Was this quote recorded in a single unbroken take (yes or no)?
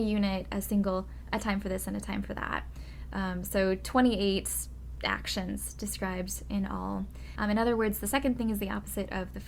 no